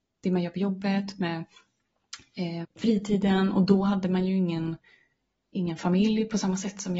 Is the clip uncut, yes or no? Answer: no